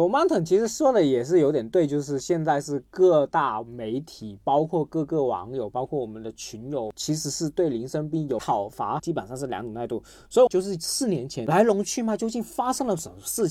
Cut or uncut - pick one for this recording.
cut